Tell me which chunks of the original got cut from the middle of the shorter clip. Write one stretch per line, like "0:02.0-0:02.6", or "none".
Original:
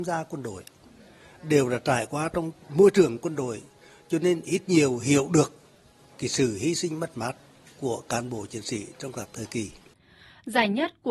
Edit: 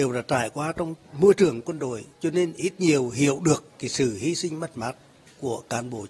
0:03.7-0:04.0
0:05.6-0:06.1